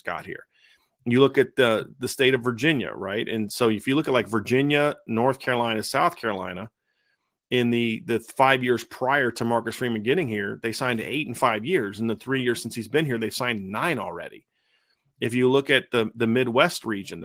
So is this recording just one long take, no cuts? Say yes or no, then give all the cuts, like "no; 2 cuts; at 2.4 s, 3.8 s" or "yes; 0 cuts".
yes; 0 cuts